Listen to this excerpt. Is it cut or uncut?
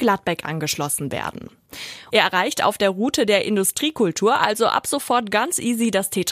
cut